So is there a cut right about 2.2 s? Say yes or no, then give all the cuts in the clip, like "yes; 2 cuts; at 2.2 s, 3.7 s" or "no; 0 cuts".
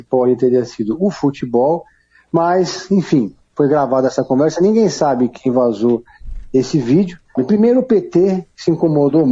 no; 1 cut; at 7.4 s